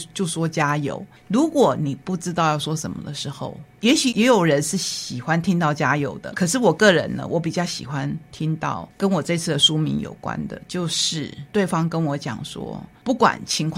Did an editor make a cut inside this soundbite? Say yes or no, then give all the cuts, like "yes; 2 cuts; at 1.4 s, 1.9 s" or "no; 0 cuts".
no; 0 cuts